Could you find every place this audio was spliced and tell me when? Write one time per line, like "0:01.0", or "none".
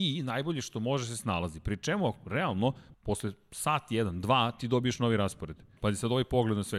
0:02.9
0:05.8